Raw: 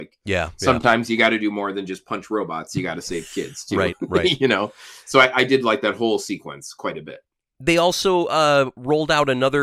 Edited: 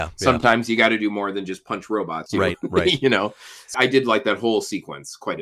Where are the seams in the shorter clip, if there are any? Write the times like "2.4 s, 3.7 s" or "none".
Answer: 2.3 s, 3.7 s